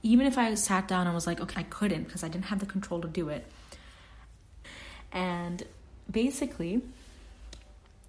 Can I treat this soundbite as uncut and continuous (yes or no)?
no